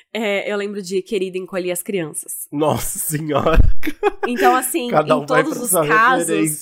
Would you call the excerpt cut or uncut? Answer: uncut